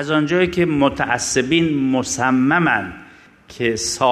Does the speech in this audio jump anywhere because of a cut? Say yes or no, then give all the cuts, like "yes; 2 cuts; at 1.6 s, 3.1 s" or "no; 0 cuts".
no; 0 cuts